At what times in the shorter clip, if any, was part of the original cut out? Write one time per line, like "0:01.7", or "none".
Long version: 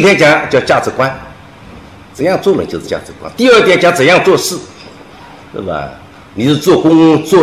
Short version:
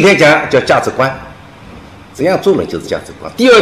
none